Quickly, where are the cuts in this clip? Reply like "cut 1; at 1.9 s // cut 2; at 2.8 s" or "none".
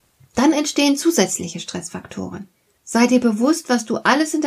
cut 1; at 2.8 s